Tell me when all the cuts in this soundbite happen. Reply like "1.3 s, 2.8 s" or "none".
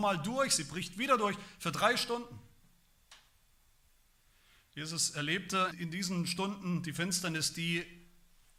5.7 s